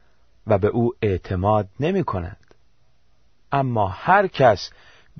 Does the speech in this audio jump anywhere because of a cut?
yes; 1 cut; at 3.3 s

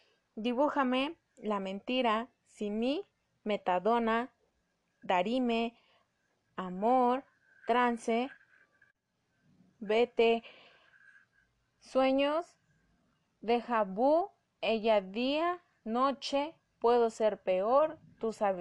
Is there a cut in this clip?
no; 0 cuts

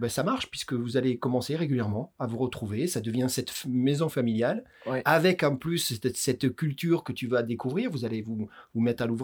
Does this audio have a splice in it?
no; 0 cuts

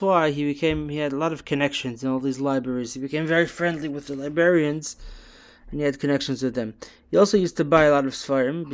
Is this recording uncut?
yes; 0 cuts

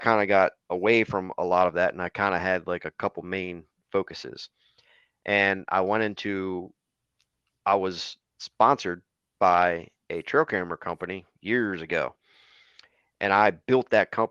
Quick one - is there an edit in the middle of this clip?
no; 0 cuts

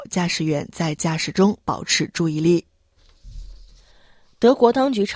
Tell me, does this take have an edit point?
no; 0 cuts

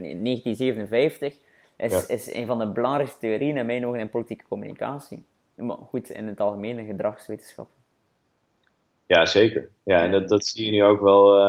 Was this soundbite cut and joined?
no; 0 cuts

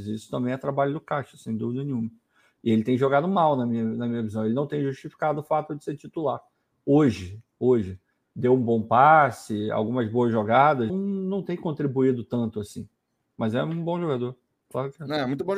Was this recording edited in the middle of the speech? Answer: yes; 2 cuts; at 10.9 s, 13.3 s

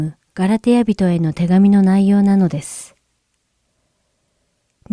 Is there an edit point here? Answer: no; 0 cuts

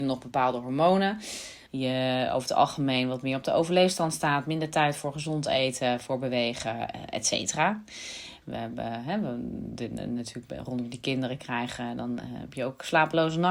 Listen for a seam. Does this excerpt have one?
yes; 2 cuts; at 1.7 s, 8.4 s

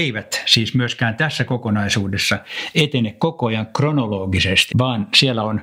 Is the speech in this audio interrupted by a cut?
yes; 1 cut; at 4.7 s

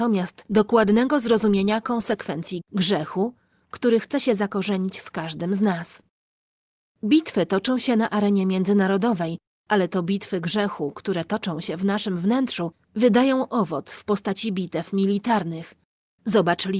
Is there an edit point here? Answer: yes; 1 cut; at 2.6 s

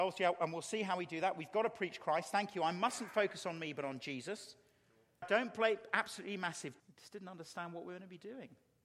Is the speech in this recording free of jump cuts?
no; 2 cuts; at 5.2 s, 6.8 s

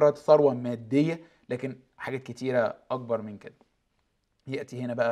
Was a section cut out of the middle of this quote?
no; 0 cuts

